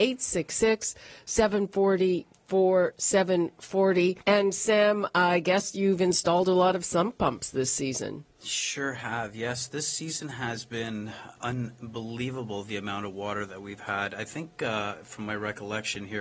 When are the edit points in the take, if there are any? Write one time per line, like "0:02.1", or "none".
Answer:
0:04.2
0:11.4